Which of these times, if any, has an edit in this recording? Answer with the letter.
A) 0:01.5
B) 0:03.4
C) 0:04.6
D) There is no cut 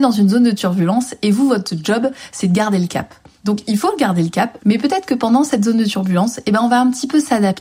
C